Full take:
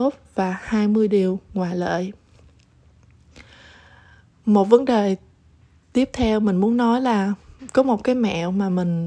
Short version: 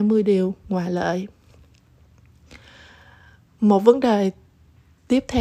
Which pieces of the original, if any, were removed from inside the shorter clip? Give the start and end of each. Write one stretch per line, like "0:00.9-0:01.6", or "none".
none